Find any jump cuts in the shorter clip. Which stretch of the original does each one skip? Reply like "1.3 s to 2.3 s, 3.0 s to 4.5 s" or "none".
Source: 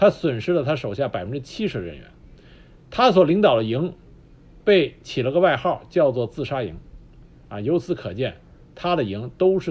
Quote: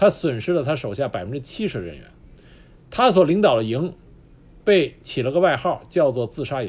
none